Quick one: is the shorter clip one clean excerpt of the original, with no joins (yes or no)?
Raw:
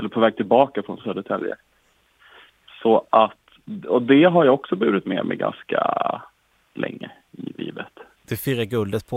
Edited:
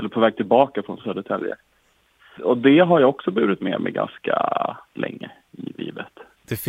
no